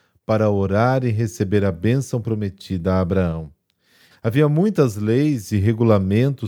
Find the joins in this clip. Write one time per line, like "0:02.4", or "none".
0:04.1